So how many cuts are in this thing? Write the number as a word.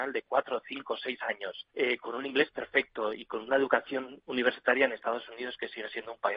one